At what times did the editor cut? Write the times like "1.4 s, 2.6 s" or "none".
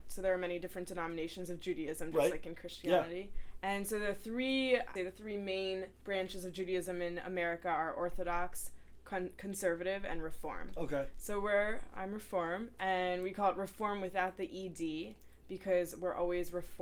5.0 s

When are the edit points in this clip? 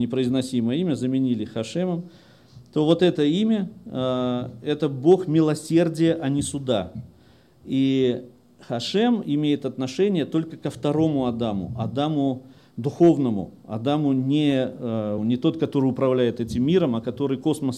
15.2 s

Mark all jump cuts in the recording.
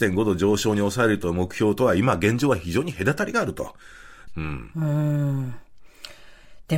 4.3 s

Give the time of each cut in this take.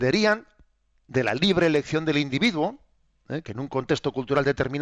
none

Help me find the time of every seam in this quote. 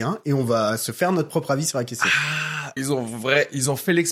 2.8 s

